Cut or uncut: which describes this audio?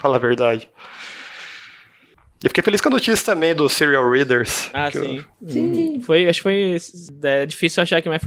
uncut